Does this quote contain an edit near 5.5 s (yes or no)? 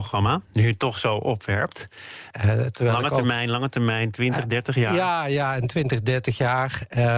no